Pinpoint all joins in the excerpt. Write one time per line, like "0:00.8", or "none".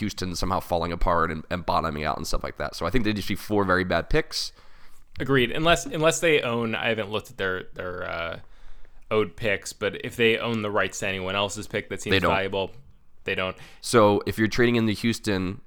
0:05.1
0:13.8